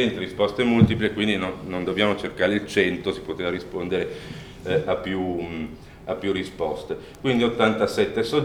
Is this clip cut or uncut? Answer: uncut